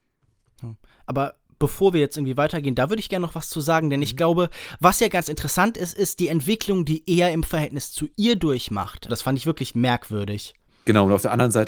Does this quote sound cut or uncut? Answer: cut